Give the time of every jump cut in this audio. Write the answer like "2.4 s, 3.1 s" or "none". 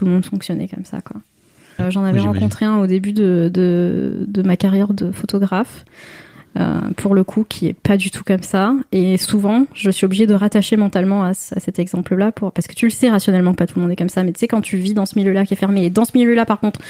1.8 s

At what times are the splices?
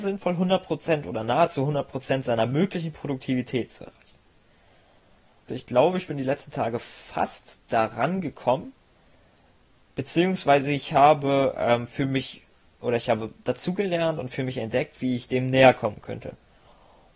5.5 s

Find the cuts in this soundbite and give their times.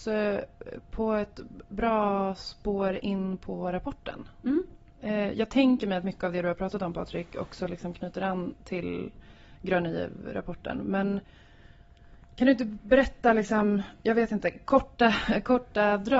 none

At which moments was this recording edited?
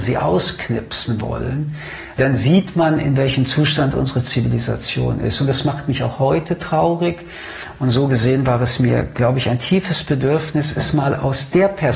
none

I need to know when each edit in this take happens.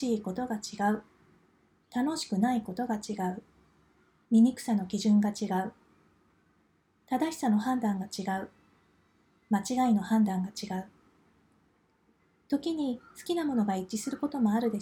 4.2 s

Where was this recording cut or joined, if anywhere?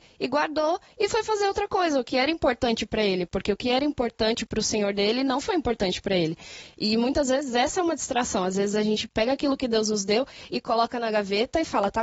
none

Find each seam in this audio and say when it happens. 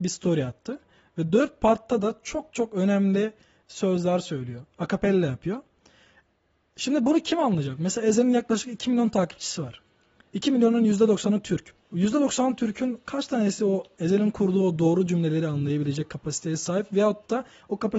11.8 s

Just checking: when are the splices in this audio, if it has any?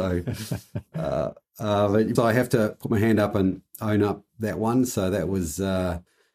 2.1 s

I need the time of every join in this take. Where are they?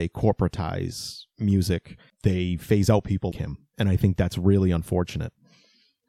2.1 s, 3.3 s

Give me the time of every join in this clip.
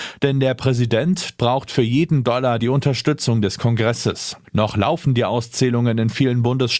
1.4 s, 2.6 s, 4.4 s

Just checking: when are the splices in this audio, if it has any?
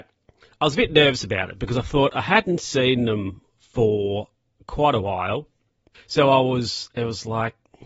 5.9 s

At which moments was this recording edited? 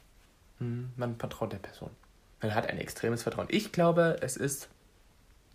none

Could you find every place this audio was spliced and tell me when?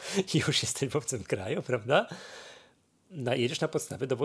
none

